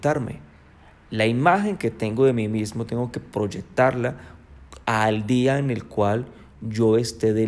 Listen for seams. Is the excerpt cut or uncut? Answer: uncut